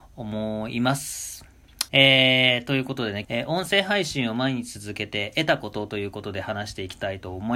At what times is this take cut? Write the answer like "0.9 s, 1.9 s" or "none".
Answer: 1.9 s, 3.2 s